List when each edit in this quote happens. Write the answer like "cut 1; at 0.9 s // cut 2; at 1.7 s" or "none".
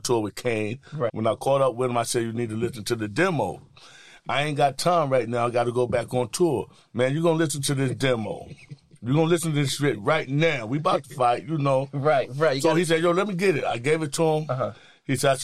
cut 1; at 1.1 s